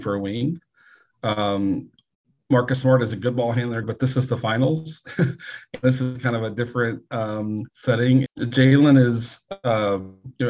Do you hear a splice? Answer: yes; 2 cuts; at 3.8 s, 8.3 s

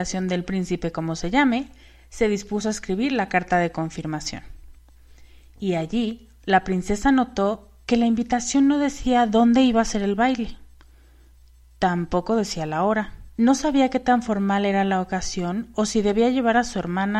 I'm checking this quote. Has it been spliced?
yes; 1 cut; at 13.3 s

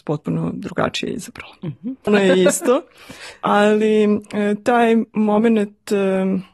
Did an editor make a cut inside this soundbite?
yes; 1 cut; at 2.1 s

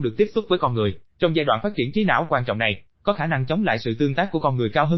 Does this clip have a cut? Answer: no; 0 cuts

